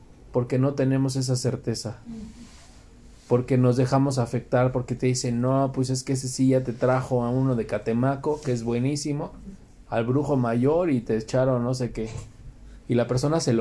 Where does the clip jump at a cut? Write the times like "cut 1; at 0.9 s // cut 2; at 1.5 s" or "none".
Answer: none